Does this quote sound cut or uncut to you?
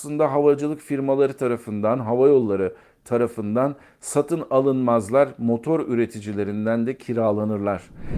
uncut